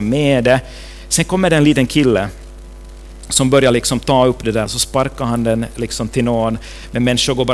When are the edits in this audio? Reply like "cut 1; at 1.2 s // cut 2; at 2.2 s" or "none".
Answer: cut 1; at 4.7 s